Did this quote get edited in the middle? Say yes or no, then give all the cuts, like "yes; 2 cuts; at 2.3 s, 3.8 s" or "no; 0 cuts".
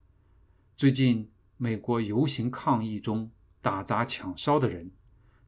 no; 0 cuts